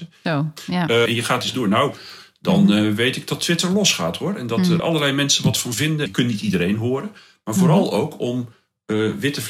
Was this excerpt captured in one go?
no; 3 cuts; at 1.1 s, 4.8 s, 6.1 s

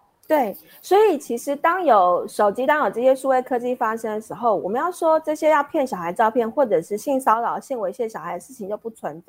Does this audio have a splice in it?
no; 0 cuts

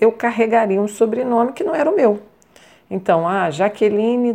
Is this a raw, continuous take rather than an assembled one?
yes; 0 cuts

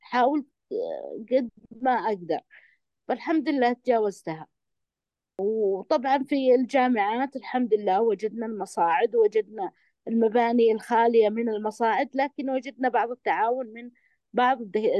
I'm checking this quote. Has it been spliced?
no; 0 cuts

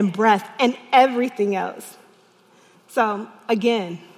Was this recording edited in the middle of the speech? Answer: yes; 1 cut; at 2.7 s

